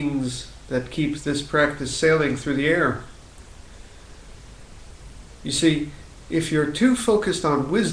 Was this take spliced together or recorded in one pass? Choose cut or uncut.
uncut